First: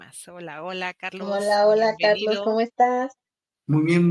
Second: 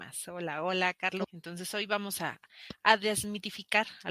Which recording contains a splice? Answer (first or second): second